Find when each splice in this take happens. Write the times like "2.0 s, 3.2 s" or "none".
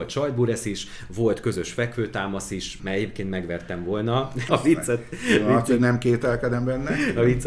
2.8 s, 4.5 s